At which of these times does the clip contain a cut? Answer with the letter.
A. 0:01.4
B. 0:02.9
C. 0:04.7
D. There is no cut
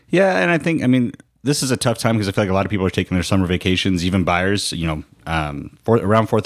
D